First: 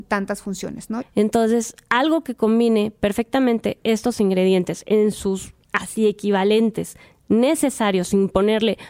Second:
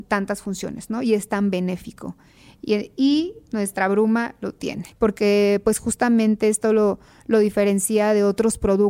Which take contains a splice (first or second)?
first